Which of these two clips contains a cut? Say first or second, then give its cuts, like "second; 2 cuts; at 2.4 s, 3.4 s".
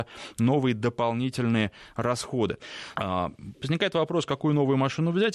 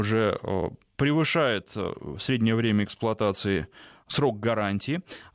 first; 1 cut; at 2.9 s